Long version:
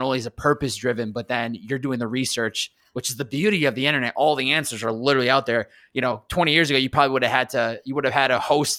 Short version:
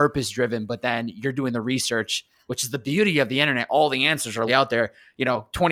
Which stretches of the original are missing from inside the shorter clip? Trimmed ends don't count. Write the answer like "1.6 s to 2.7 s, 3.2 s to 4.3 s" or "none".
4.9 s to 5.2 s